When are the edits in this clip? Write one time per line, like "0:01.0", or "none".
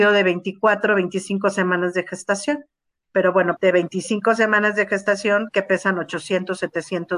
0:03.6